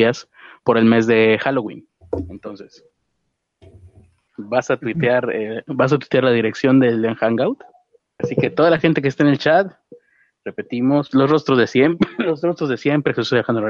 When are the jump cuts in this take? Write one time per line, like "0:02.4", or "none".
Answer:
0:04.3
0:08.2
0:11.1